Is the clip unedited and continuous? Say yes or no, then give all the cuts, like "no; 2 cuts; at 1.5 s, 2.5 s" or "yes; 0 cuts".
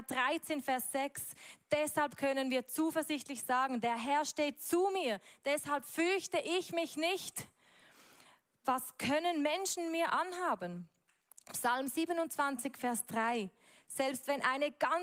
yes; 0 cuts